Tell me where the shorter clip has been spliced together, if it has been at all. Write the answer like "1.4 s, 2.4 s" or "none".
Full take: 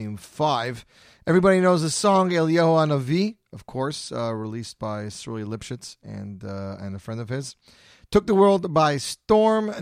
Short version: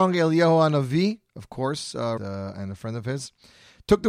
2.2 s